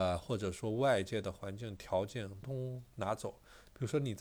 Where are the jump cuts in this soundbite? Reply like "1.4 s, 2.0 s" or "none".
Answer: 2.4 s